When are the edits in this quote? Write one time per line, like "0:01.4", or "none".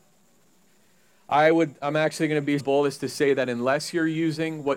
0:02.6